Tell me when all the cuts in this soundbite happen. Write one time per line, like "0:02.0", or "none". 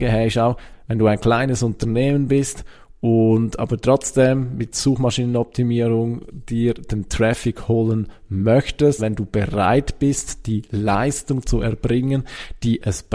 0:09.0